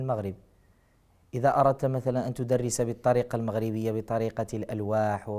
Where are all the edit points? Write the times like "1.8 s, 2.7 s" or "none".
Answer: none